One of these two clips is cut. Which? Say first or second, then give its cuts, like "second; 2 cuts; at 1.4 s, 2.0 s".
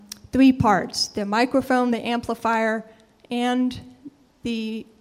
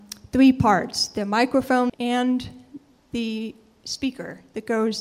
second; 1 cut; at 1.9 s